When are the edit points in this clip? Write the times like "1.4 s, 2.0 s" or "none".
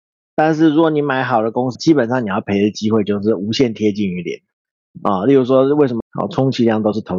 1.8 s, 6.0 s